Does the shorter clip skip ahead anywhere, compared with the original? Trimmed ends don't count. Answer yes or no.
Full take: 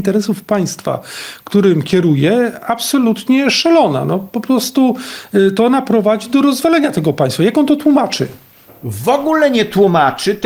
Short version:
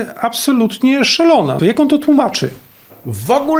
yes